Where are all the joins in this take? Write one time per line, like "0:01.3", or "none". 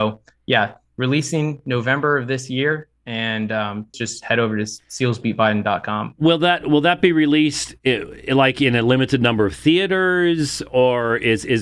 0:03.9